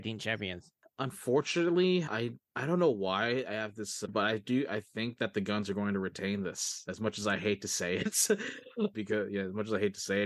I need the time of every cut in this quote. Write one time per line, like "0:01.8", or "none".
0:02.4
0:04.1
0:08.9